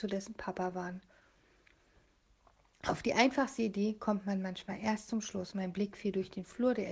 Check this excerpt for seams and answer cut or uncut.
uncut